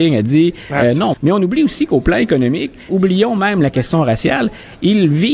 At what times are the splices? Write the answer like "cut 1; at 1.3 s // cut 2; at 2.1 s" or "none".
cut 1; at 1.1 s // cut 2; at 2.9 s